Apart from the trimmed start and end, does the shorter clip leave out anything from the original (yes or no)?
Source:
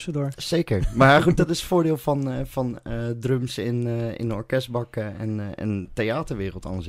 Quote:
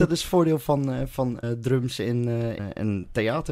yes